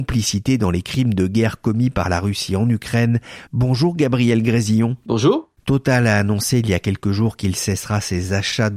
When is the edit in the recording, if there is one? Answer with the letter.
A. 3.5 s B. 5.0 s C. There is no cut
A